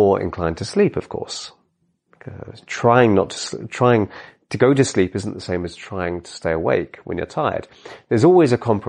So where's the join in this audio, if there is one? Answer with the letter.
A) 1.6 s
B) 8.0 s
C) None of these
C